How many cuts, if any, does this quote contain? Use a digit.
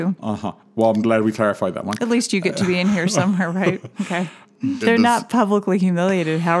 1